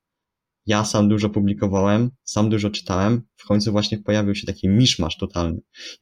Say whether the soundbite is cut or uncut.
cut